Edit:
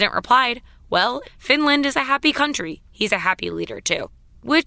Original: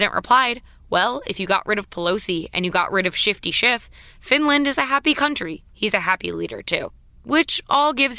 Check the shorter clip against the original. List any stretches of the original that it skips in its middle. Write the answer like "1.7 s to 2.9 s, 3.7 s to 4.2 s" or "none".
1.2 s to 4.1 s